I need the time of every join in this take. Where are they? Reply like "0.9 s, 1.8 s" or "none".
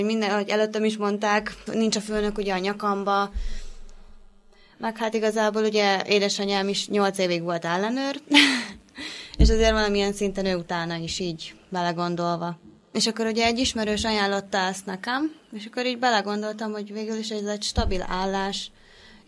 1.7 s, 12.9 s